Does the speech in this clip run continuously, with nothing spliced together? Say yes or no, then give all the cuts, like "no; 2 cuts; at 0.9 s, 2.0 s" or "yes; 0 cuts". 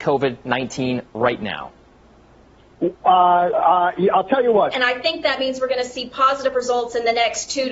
no; 2 cuts; at 3.5 s, 4.7 s